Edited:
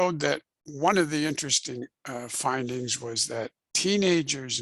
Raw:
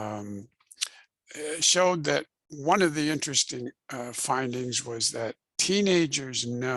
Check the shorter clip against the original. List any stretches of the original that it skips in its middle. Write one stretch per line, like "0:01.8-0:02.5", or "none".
none